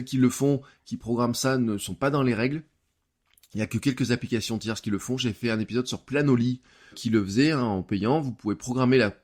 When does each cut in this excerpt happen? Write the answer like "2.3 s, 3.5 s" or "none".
6.9 s

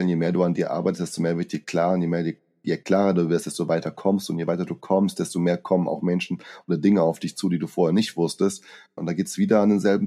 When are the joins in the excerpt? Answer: 9.0 s

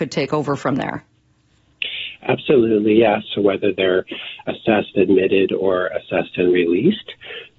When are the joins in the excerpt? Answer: 3.2 s

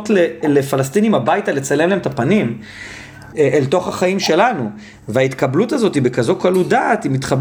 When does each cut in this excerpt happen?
3.3 s

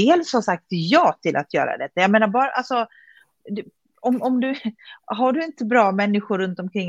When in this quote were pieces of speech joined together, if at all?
none

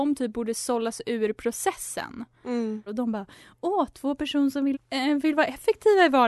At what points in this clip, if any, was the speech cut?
2.9 s, 4.7 s

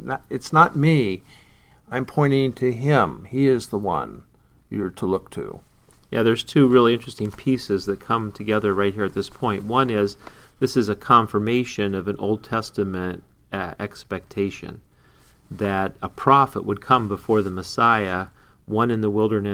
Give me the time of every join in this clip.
none

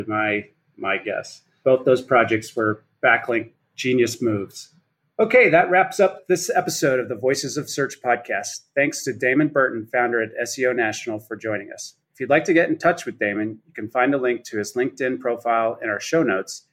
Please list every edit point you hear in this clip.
none

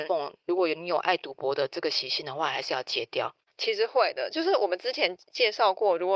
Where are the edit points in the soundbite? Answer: 3.5 s

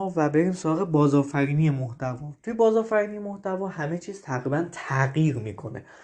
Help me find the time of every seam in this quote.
none

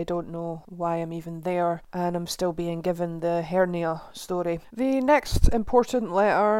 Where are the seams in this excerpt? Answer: 4.7 s

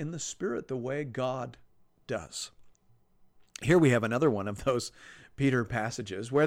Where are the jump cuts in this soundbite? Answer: none

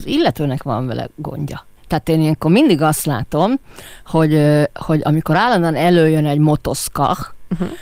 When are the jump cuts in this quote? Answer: 1.8 s

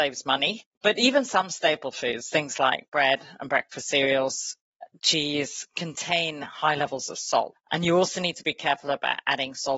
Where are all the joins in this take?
7.5 s

